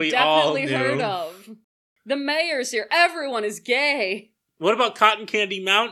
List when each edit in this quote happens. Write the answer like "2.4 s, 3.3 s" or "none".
none